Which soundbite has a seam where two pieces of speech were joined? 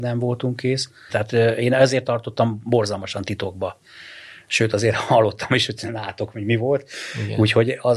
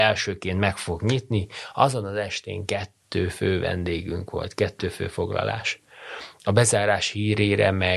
first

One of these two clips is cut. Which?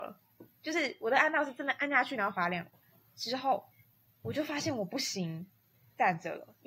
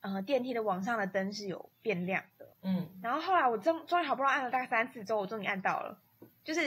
second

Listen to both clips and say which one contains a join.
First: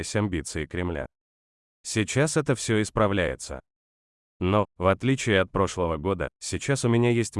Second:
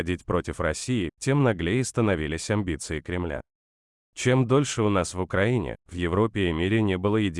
first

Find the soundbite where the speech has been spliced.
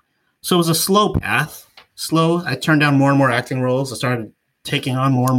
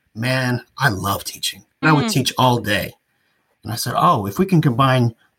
second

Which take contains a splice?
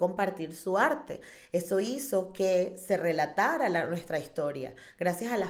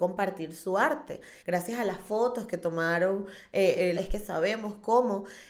second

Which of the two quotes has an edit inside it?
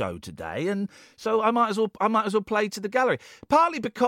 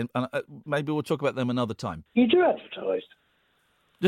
second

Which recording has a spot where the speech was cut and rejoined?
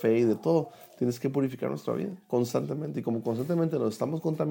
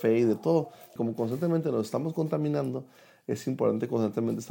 second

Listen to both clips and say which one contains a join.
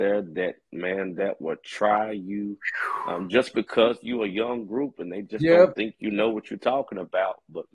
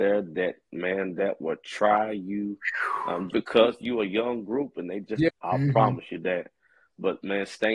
second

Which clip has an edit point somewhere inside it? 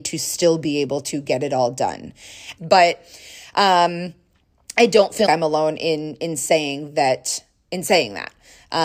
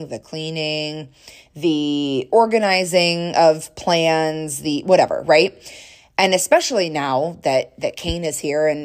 first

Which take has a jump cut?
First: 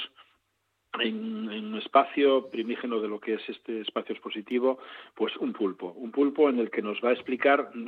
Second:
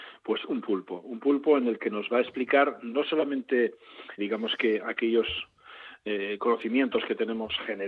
second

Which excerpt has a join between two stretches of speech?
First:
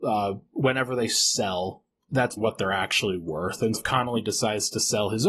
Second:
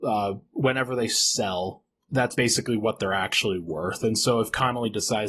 first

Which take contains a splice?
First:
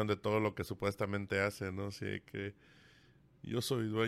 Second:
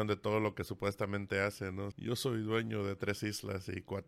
second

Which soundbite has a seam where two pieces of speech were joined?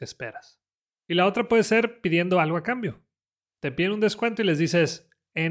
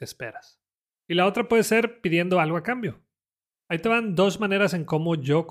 second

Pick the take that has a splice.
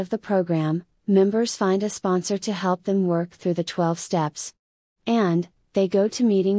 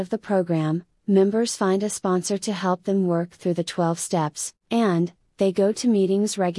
second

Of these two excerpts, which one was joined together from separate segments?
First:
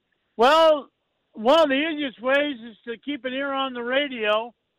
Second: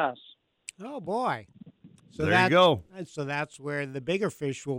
second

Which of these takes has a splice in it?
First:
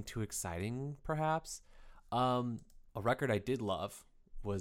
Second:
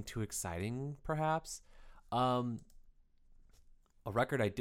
first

